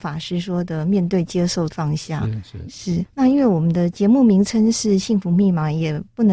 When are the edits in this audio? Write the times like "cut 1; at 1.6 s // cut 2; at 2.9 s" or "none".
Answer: cut 1; at 1.7 s